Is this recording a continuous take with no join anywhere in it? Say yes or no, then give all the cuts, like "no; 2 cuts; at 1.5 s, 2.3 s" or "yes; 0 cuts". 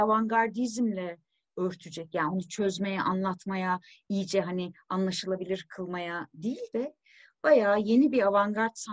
yes; 0 cuts